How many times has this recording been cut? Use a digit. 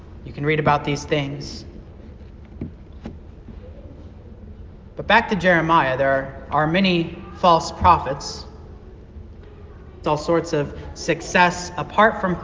1